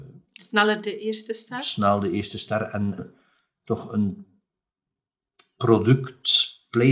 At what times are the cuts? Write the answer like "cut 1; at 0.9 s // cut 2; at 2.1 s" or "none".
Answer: cut 1; at 3.0 s